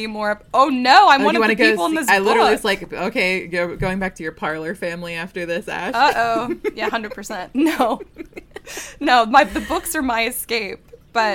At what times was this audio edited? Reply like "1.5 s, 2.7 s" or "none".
none